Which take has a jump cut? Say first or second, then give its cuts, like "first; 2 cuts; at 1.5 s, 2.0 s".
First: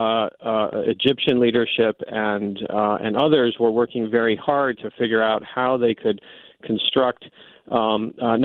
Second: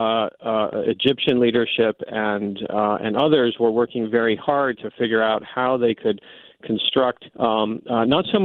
second; 1 cut; at 7.3 s